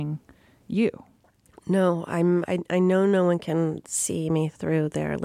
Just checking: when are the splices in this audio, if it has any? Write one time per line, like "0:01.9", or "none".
0:02.5

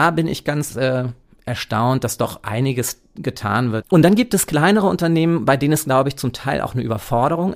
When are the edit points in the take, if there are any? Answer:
0:03.8

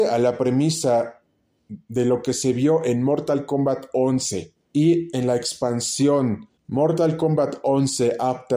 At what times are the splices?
0:04.6
0:06.6

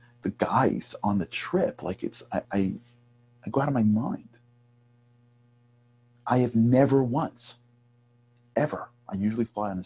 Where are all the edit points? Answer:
0:02.4

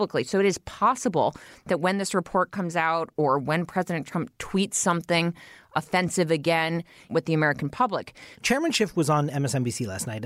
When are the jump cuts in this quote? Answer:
0:07.1
0:08.3

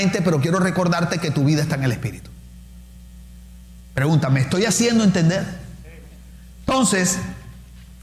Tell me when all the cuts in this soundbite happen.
none

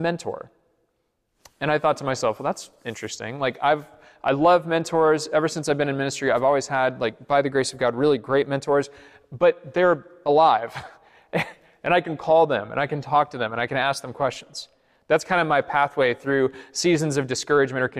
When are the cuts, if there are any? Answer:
none

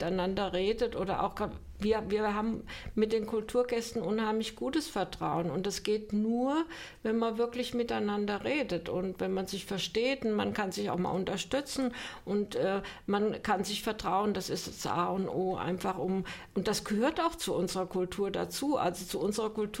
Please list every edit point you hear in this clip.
none

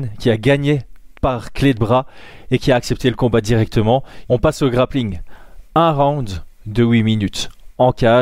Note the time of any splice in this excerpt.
0:04.3

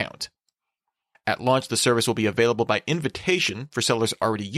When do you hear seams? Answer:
0:01.1

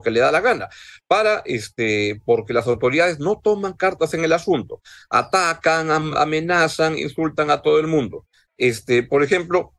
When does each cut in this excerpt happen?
none

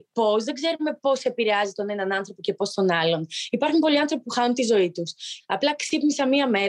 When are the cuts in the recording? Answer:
0:05.4

